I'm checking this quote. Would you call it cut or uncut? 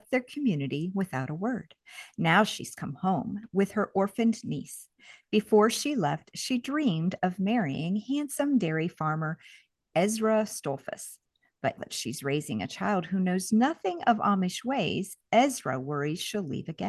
cut